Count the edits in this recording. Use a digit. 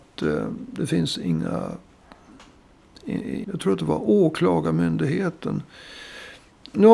1